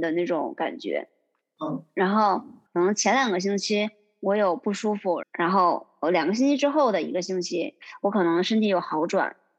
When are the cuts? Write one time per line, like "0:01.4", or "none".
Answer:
0:02.7
0:05.2